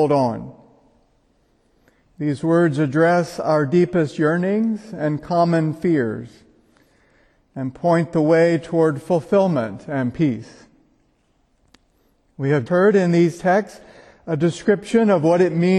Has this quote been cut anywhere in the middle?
yes; 1 cut; at 12.7 s

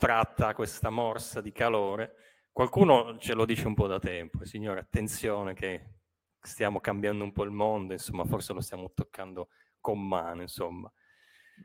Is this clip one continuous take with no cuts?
yes; 0 cuts

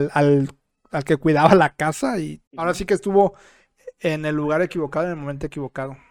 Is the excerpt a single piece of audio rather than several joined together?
no; 1 cut; at 2.5 s

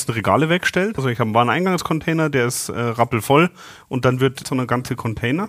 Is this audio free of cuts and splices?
no; 2 cuts; at 1.0 s, 4.4 s

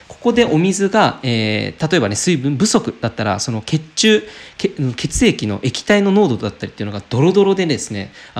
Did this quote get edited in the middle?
no; 0 cuts

